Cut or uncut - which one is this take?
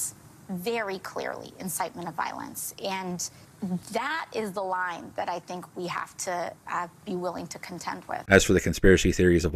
cut